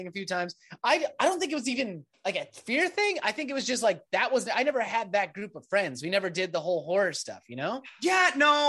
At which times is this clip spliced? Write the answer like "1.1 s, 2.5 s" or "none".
none

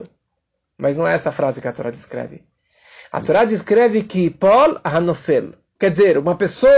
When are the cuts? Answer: 5.8 s

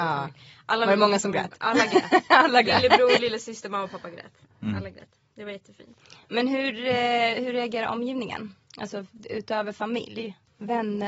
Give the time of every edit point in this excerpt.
none

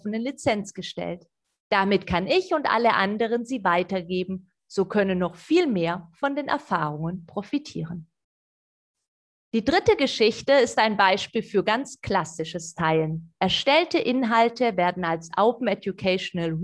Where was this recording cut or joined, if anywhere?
9.5 s

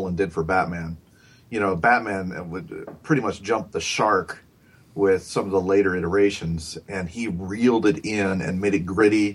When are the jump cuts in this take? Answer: none

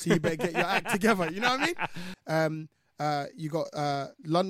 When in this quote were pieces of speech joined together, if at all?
2.1 s

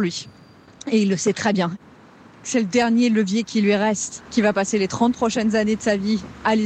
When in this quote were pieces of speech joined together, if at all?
4.3 s

